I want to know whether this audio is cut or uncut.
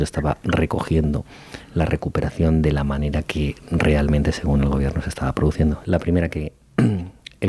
cut